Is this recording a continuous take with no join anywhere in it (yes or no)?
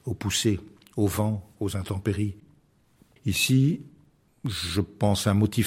no